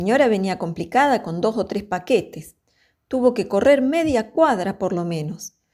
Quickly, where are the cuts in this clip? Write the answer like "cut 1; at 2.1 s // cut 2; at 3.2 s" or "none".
none